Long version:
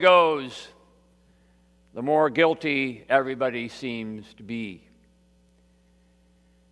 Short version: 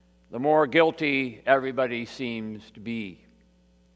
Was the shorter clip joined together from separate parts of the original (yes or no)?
no